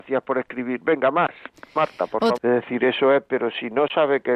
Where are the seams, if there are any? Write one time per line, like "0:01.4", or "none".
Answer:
0:02.3

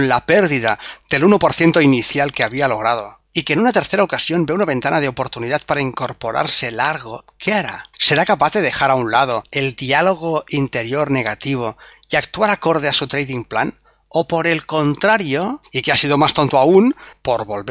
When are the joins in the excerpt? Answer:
0:15.6

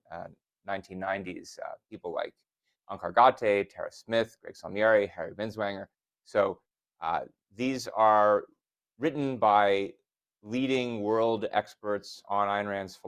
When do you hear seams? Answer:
none

